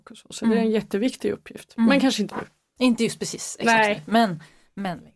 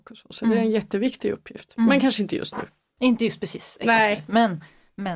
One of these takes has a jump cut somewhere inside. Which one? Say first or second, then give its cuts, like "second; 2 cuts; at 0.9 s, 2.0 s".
first; 1 cut; at 2.3 s